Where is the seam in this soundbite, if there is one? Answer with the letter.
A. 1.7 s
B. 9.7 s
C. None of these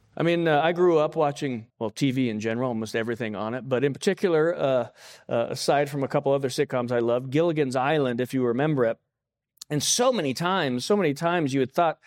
A